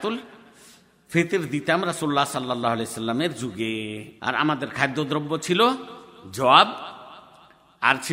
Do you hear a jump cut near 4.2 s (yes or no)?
yes